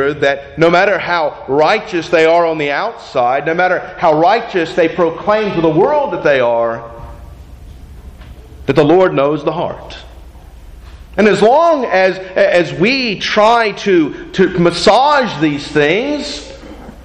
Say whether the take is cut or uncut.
cut